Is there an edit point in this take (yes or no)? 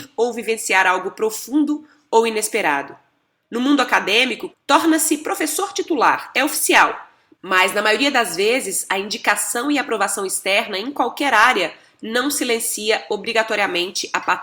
yes